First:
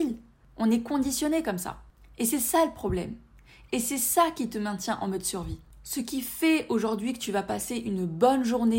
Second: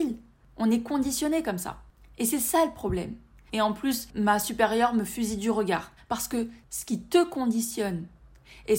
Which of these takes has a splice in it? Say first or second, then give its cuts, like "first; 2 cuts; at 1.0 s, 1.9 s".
second; 2 cuts; at 3.5 s, 6.0 s